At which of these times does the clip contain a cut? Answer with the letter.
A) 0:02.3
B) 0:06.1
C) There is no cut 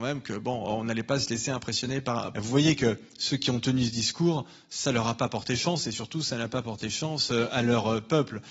A